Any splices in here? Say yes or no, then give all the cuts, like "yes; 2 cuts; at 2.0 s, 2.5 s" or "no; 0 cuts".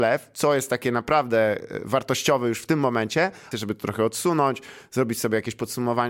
yes; 1 cut; at 3.5 s